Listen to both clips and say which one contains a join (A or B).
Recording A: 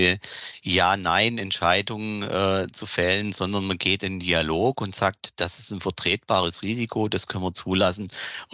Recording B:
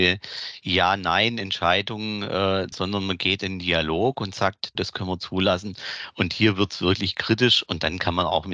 B